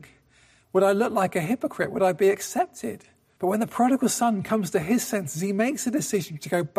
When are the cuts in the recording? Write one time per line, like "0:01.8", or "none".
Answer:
0:03.4